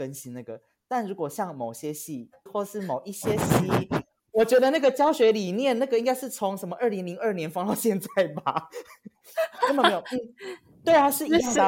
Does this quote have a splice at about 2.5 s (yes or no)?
yes